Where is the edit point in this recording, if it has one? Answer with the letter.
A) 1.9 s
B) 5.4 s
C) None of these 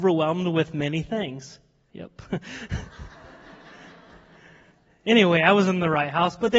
A